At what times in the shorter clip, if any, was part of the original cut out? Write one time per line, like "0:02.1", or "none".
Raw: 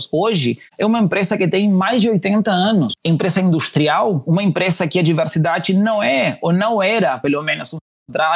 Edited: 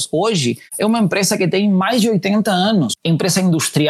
none